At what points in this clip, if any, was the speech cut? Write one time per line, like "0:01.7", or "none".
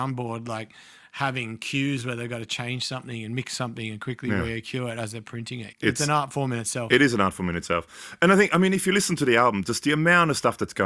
0:05.7

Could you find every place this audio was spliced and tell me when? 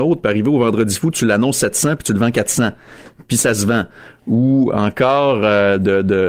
0:03.3

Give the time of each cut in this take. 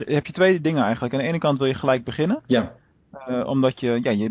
none

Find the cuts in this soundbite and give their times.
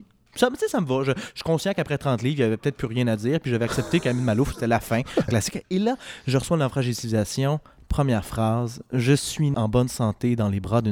0:05.3
0:09.5

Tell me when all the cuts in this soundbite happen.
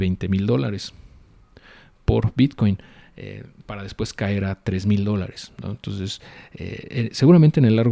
none

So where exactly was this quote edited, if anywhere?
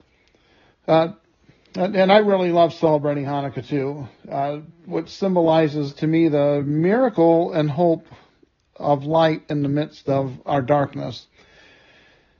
none

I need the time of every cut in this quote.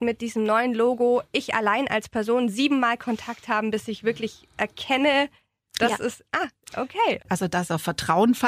0:07.2

